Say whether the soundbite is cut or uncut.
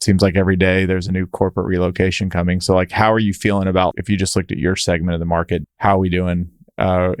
cut